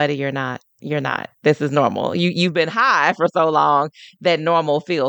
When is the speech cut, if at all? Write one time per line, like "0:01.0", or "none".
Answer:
none